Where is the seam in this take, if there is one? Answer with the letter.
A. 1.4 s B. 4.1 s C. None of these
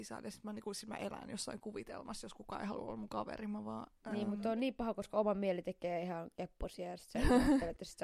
C